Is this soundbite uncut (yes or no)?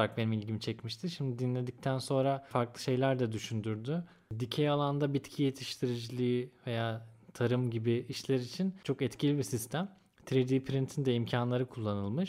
yes